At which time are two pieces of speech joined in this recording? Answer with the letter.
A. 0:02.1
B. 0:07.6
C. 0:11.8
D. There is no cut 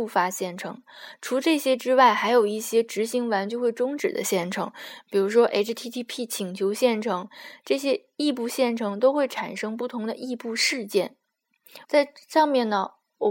C